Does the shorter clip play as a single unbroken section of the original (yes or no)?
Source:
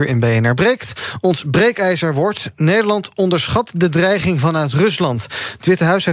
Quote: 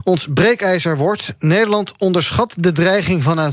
yes